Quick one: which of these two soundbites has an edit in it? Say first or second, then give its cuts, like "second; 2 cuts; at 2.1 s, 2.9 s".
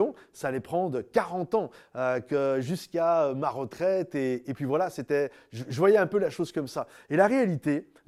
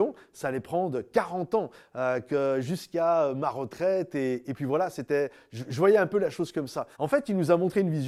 second; 1 cut; at 6.9 s